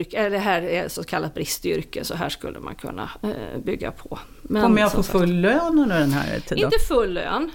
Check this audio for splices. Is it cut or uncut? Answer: uncut